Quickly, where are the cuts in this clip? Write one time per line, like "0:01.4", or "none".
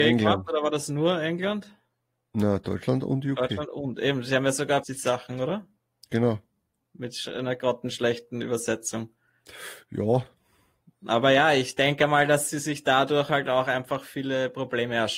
0:04.8